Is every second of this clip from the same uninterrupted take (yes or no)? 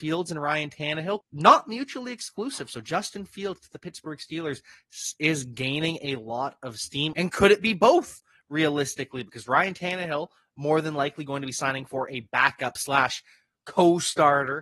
no